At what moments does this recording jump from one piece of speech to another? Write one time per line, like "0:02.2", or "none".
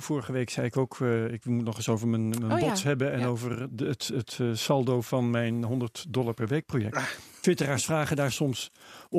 none